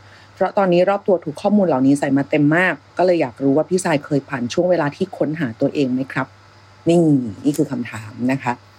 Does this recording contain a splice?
no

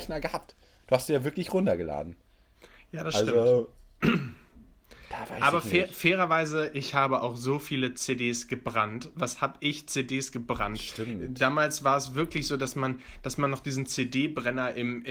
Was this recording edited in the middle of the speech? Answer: no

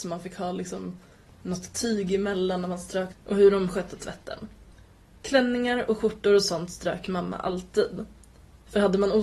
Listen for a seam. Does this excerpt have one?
yes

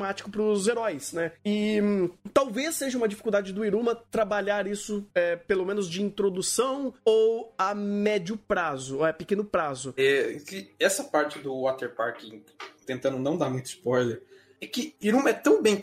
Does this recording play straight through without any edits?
no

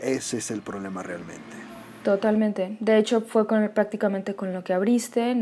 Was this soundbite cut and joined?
no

